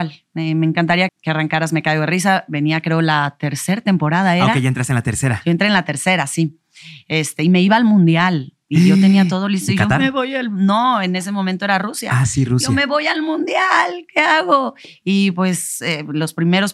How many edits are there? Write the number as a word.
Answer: one